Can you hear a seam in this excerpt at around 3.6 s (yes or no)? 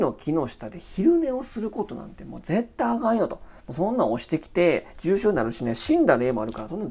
no